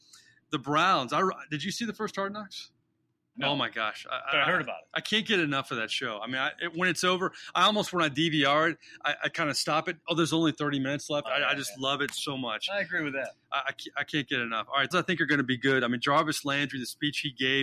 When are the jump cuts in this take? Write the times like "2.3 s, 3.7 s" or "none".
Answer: 3.3 s, 11.2 s, 14.9 s